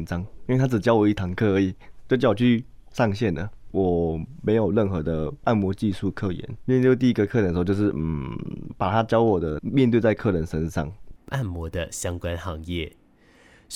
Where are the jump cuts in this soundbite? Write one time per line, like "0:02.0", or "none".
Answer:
0:11.2